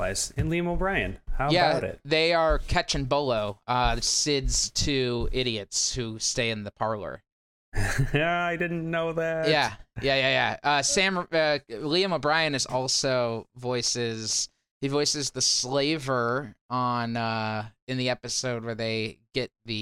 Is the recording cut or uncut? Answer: uncut